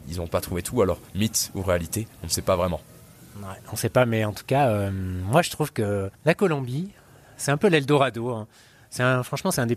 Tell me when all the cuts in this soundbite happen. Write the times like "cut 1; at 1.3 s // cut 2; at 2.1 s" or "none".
cut 1; at 6.1 s